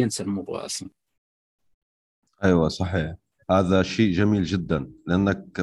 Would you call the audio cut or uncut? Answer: cut